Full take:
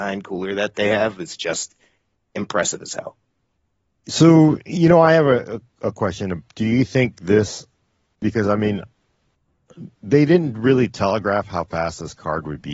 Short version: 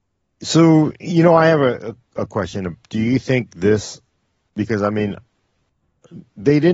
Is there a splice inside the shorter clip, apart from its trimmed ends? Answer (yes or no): no